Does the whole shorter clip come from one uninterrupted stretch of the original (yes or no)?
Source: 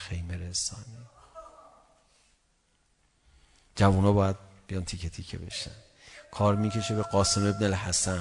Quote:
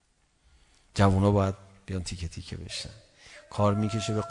yes